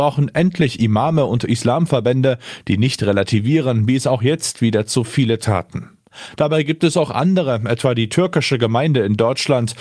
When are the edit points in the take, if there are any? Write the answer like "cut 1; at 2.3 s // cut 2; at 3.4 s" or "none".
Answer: none